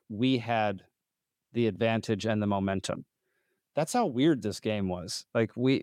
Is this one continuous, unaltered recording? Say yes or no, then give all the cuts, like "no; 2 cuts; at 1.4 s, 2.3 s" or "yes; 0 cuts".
yes; 0 cuts